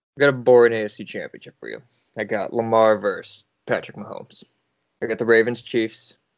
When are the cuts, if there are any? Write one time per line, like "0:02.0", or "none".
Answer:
none

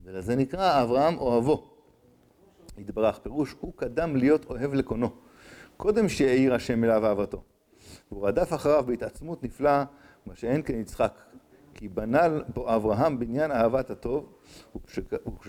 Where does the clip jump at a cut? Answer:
none

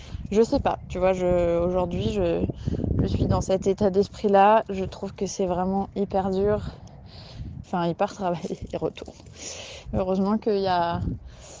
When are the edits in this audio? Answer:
0:07.6
0:09.9

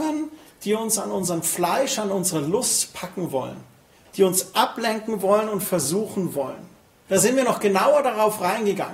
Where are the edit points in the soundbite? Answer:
0:07.1

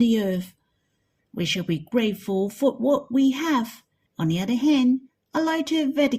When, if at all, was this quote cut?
0:01.2
0:04.1

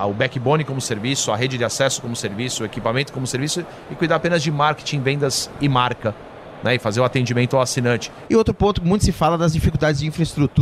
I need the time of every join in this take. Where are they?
0:08.2

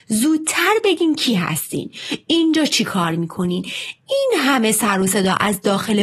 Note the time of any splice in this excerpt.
none

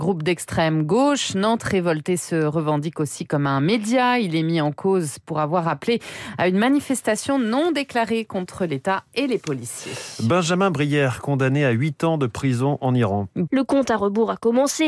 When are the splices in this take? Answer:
0:13.5

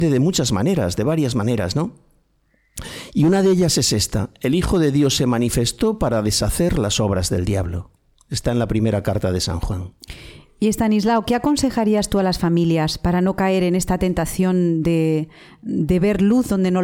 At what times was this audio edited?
none

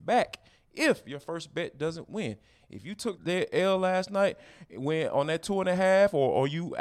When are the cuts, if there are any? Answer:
0:03.2

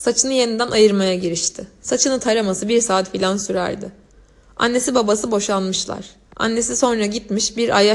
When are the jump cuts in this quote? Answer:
none

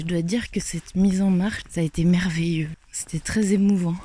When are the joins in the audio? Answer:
0:01.6
0:02.7

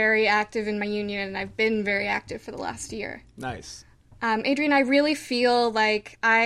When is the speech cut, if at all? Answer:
none

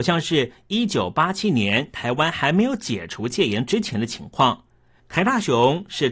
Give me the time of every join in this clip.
0:05.0

